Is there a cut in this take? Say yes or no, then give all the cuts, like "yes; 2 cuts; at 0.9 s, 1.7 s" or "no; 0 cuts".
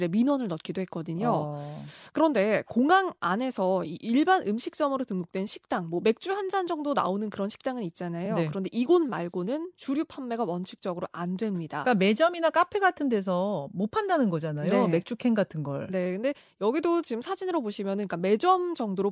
no; 0 cuts